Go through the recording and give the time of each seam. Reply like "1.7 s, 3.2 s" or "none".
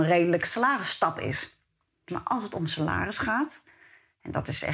2.1 s